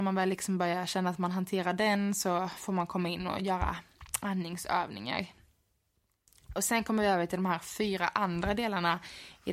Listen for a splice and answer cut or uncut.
uncut